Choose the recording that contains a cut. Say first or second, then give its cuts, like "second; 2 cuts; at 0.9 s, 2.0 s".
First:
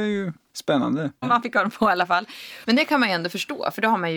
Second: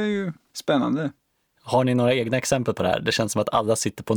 first; 2 cuts; at 1.2 s, 2.6 s